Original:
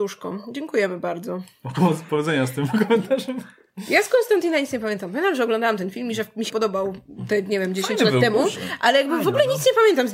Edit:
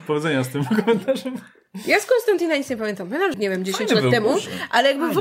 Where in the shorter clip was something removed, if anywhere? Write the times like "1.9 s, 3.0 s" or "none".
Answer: 3.3 s